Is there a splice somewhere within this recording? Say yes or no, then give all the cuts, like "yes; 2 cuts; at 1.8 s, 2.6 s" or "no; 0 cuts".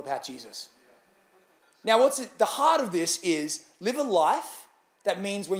no; 0 cuts